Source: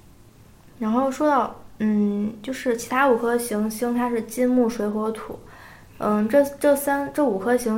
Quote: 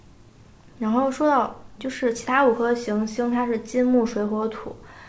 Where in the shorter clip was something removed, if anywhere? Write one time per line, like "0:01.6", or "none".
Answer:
0:01.8